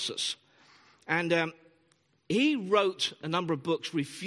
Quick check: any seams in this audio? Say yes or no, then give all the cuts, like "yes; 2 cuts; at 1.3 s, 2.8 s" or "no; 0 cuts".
no; 0 cuts